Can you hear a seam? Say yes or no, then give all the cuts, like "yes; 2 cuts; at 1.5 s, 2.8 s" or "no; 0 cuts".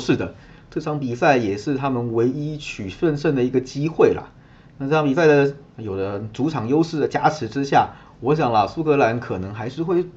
yes; 1 cut; at 5.7 s